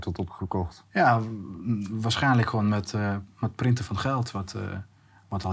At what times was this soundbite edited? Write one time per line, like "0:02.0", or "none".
none